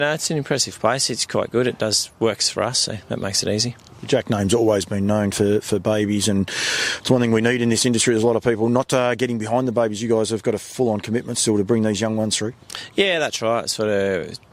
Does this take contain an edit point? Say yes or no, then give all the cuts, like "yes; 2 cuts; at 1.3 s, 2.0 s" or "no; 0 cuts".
no; 0 cuts